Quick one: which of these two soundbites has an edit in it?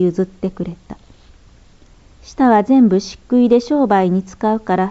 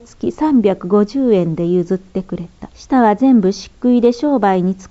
second; 1 cut; at 2.7 s

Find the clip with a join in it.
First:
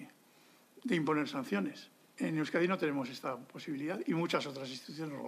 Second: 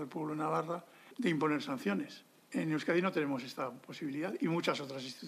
second; 1 cut; at 1.1 s

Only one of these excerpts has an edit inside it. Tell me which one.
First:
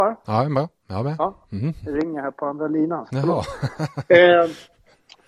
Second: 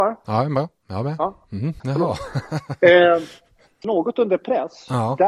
second; 2 cuts; at 1.8 s, 3.8 s

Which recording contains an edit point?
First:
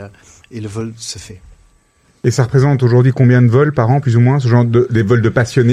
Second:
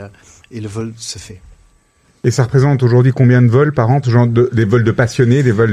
second; 1 cut; at 4.0 s

